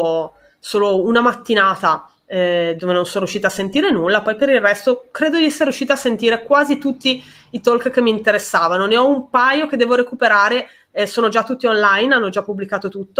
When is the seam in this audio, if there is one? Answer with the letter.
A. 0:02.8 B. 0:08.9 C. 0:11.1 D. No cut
A